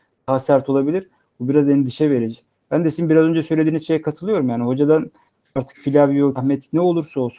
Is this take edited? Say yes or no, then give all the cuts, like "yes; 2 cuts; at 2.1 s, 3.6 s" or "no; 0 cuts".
yes; 1 cut; at 6.4 s